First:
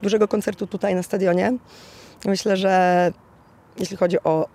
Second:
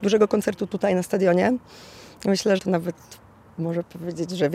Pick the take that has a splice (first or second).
second